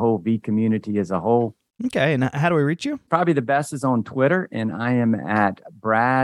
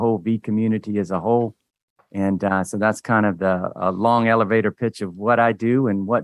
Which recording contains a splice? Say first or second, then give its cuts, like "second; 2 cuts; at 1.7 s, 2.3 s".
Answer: first; 2 cuts; at 1.8 s, 3.1 s